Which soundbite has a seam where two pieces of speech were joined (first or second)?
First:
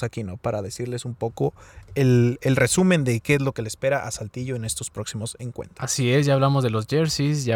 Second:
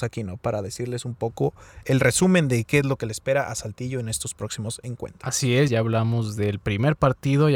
second